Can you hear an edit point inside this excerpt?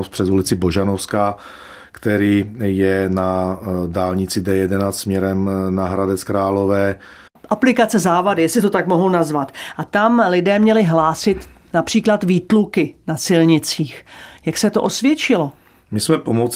yes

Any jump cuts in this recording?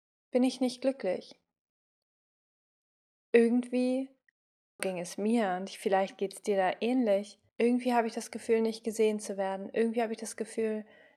yes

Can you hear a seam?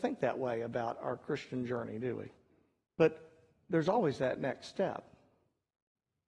yes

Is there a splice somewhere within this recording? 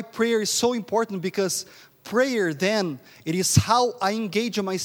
no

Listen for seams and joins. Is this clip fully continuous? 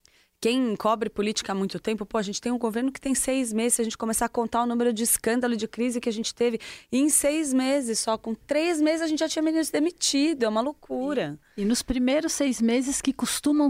yes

